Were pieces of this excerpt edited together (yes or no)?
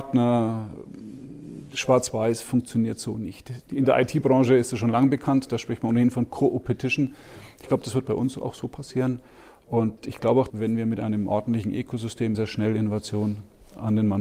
yes